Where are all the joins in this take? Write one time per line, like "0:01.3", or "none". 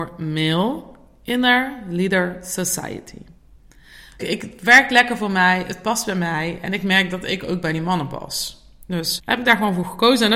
0:04.2
0:09.2